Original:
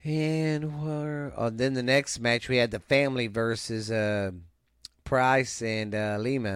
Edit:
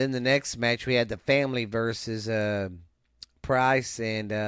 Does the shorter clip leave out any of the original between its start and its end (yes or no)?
no